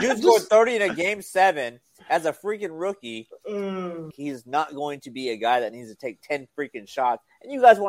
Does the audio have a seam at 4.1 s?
yes; 1 cut; at 4.1 s

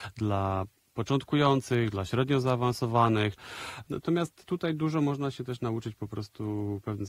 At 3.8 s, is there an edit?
yes; 1 cut; at 3.8 s

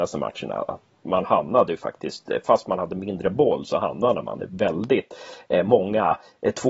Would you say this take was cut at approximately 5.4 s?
no; 1 cut; at 0.9 s

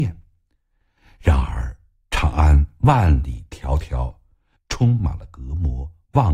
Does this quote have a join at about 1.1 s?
no; 1 cut; at 4.6 s

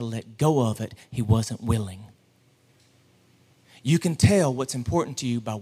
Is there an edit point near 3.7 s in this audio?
no; 0 cuts

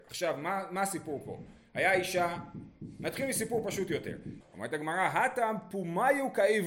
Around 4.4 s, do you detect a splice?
yes; 1 cut; at 4.4 s

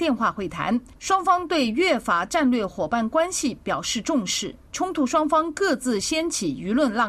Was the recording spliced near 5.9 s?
no; 1 cut; at 4.7 s

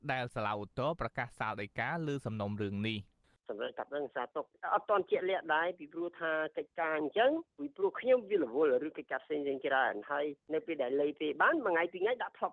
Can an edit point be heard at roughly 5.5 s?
no; 0 cuts

